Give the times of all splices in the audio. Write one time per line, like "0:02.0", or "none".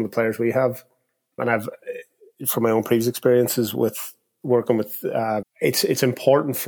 0:01.4
0:05.4